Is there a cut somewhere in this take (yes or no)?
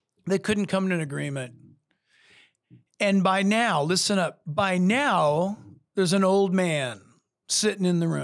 no